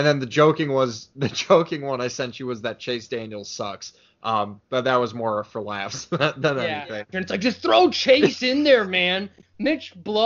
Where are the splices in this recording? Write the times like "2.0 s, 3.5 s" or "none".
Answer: 7.1 s